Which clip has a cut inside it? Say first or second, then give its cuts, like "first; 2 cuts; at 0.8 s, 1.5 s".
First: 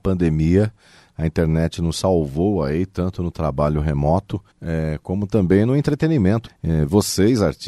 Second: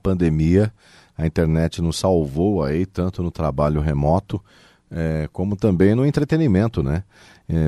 first; 2 cuts; at 4.5 s, 6.5 s